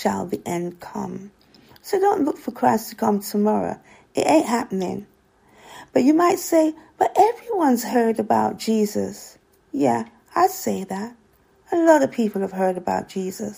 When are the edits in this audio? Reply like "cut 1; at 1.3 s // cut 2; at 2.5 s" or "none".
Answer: none